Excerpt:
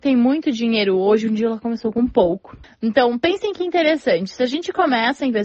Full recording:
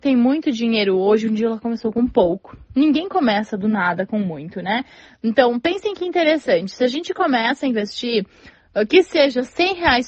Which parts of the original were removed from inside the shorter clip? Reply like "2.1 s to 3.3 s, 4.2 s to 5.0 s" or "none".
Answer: 2.6 s to 5.0 s